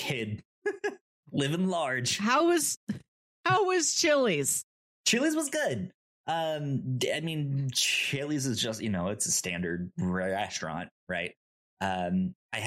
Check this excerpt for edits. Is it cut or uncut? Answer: uncut